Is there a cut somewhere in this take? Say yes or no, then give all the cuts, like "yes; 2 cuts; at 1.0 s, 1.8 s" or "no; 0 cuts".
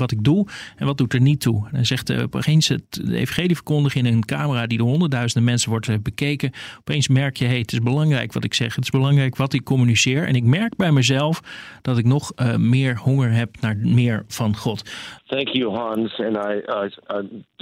yes; 1 cut; at 15.2 s